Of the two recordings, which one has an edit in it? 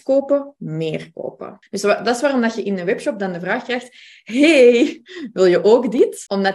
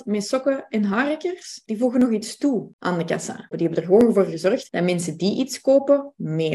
second; 2 cuts; at 1.6 s, 3.5 s

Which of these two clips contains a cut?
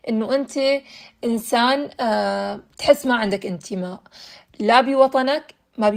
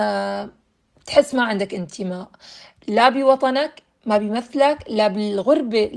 first; 1 cut; at 2.7 s

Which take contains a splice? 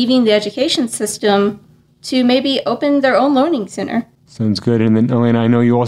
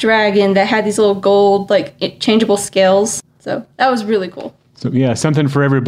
first; 1 cut; at 4.2 s

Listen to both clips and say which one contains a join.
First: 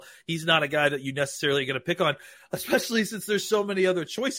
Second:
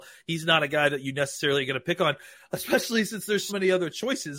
second; 1 cut; at 3.5 s

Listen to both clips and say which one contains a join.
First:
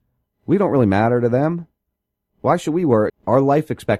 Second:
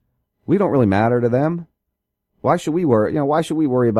first; 1 cut; at 3.1 s

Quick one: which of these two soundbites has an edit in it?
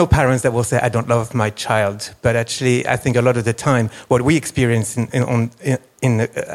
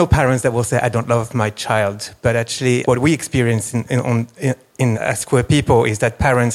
second; 2 cuts; at 2.8 s, 4.9 s

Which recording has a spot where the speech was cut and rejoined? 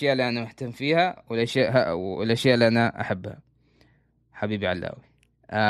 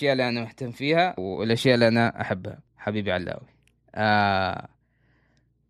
second; 2 cuts; at 1.2 s, 2.7 s

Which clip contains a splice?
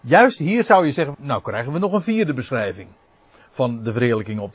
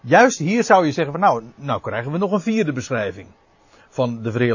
first; 1 cut; at 1.1 s

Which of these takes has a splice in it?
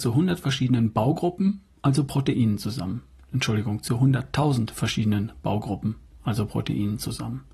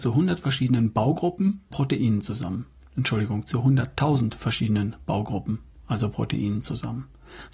second; 1 cut; at 1.7 s

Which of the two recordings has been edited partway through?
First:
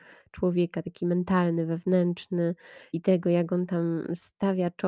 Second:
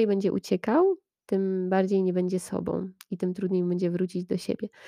first; 1 cut; at 2.9 s

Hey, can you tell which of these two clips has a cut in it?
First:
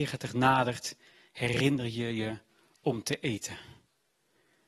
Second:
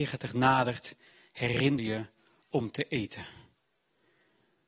second; 1 cut; at 1.8 s

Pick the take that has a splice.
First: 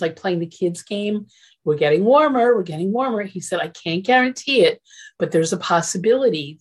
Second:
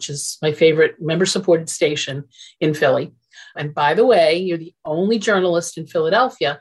second; 1 cut; at 3.5 s

